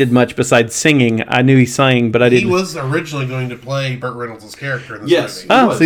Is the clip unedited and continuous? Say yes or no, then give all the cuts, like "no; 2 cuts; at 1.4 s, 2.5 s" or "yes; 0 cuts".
yes; 0 cuts